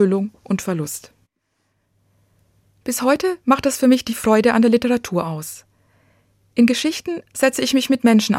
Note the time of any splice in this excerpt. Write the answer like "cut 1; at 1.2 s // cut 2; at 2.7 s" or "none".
none